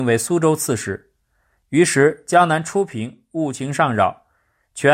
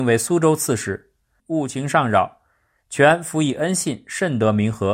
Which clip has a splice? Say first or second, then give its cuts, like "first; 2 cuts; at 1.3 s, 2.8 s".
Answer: second; 1 cut; at 1.4 s